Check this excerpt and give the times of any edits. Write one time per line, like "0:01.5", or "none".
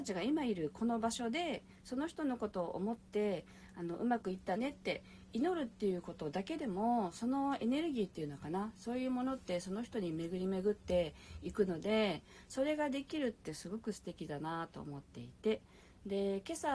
0:04.6